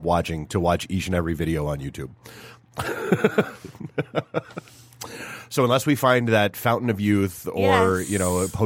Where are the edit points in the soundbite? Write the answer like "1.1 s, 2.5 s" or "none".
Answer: none